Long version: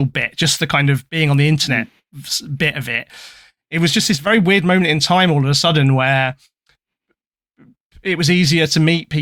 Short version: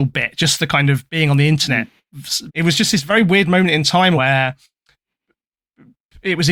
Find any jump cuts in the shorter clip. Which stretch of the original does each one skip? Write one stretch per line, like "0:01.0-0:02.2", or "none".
0:02.5-0:03.6
0:05.3-0:06.0